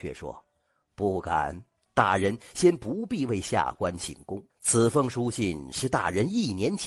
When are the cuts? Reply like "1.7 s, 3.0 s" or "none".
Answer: 4.5 s